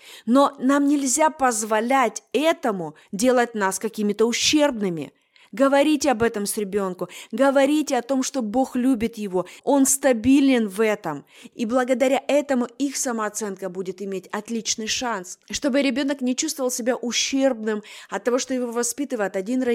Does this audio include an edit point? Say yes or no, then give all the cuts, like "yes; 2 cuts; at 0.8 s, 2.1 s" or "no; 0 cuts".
yes; 3 cuts; at 9.6 s, 11.5 s, 15.4 s